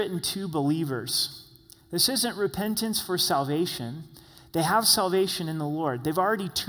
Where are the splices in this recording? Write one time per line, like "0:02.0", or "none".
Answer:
none